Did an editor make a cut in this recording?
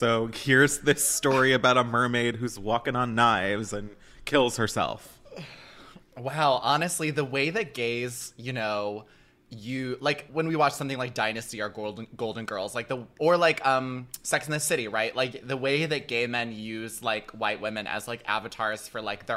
yes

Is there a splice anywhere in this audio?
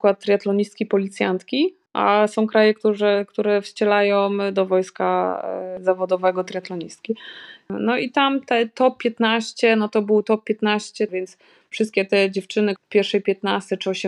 yes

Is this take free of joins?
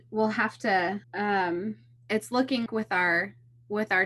no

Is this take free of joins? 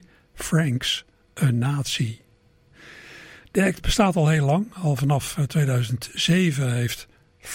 yes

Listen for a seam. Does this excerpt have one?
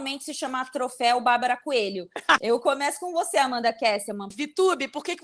yes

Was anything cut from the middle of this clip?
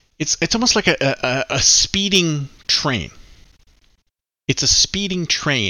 no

